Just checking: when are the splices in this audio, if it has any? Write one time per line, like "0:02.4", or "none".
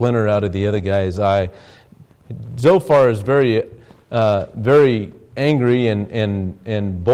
none

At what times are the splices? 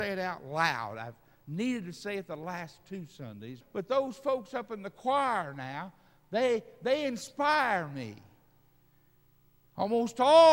0:03.6

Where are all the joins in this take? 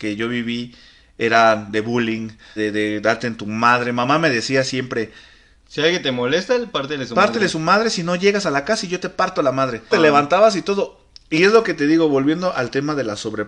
0:02.6
0:09.9

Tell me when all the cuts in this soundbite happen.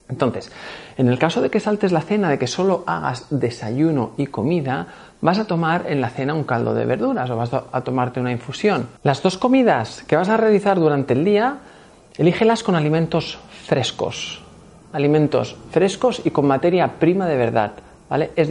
0:09.0

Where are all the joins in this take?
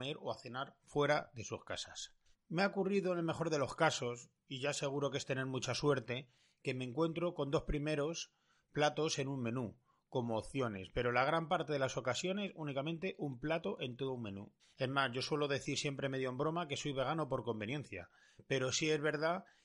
0:02.3
0:14.6

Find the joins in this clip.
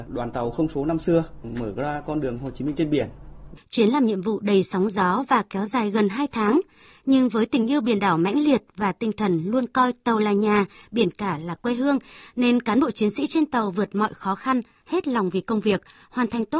0:03.6

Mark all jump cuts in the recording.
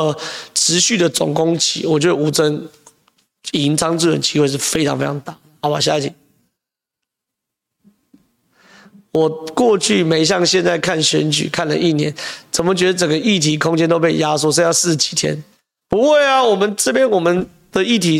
none

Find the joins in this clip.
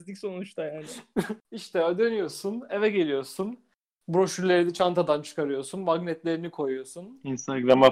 none

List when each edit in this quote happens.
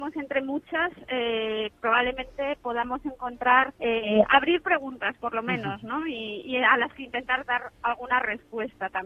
0:03.7

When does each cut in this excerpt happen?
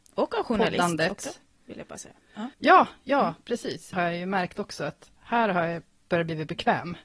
0:02.5
0:03.9

